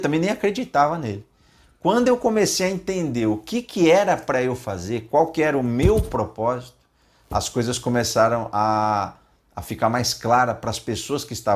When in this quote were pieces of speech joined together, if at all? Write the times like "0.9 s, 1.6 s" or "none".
none